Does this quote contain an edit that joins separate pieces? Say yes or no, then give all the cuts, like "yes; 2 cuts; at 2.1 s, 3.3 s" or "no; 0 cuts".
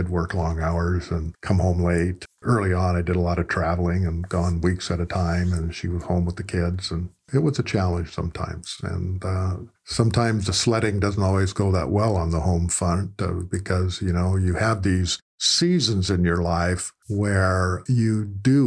no; 0 cuts